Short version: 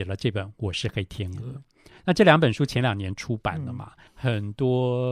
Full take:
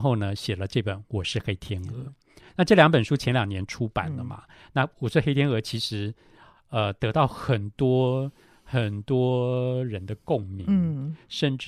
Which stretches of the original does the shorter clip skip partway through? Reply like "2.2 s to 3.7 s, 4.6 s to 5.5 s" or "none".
4.6 s to 8.6 s